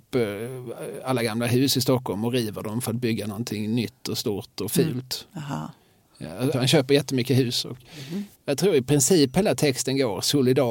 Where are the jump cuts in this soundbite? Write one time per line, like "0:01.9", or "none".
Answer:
0:06.5
0:08.3